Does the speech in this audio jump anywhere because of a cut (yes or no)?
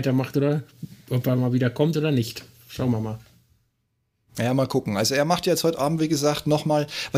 no